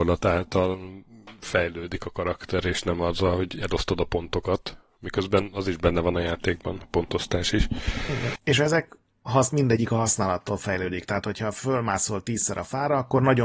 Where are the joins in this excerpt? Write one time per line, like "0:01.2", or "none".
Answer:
0:08.4